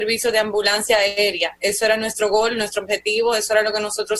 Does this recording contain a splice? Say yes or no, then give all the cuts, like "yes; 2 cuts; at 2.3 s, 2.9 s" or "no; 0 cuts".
no; 0 cuts